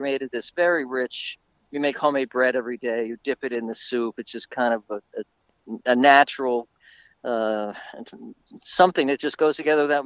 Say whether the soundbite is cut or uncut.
uncut